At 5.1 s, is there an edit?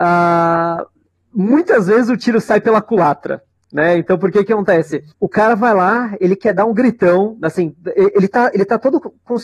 yes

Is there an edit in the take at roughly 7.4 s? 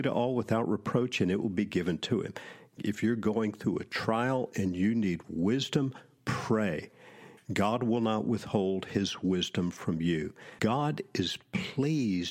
no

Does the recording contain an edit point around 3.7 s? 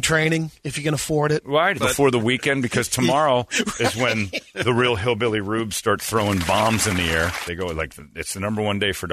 no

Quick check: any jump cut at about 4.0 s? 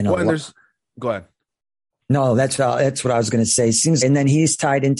yes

